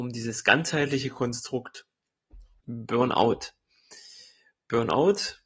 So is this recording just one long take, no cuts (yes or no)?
no